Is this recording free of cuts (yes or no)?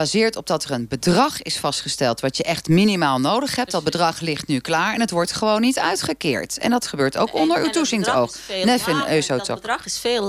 yes